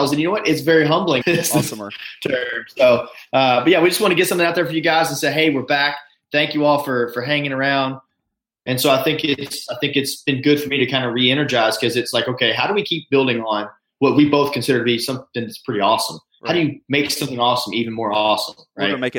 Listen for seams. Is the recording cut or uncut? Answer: cut